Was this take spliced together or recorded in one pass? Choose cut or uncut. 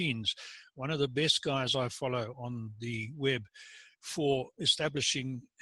cut